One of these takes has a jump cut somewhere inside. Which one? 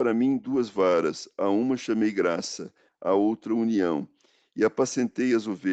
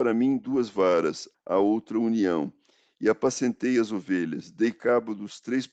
second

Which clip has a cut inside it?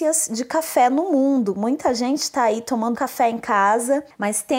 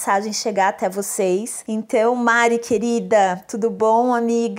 first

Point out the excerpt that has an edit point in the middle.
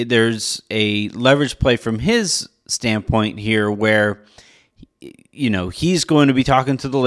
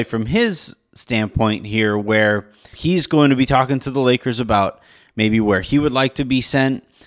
second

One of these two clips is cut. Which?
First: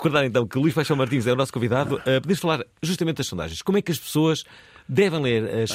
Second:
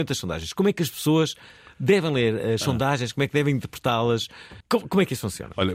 second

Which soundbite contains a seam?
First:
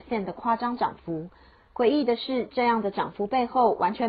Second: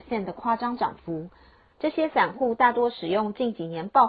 second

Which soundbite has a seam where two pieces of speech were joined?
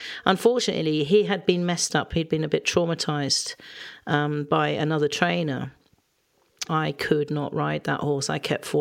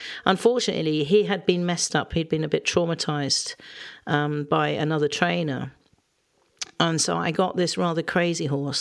first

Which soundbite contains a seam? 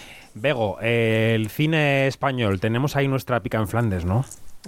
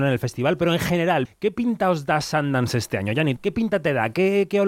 second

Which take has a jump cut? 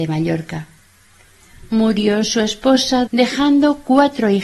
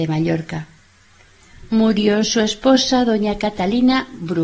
first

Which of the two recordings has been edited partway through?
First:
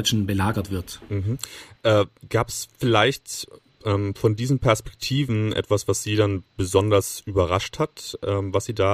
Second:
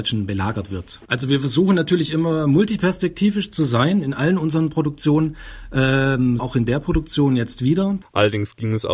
second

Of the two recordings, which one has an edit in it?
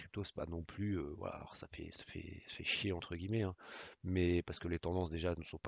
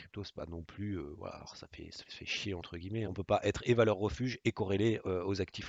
second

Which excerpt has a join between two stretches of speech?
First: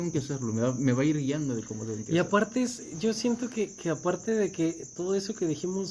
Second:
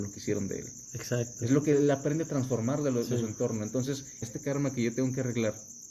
second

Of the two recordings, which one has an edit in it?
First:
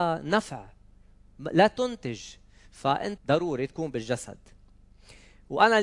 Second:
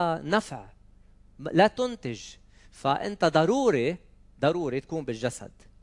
first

